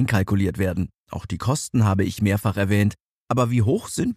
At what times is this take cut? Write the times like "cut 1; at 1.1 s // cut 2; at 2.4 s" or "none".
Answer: cut 1; at 1.0 s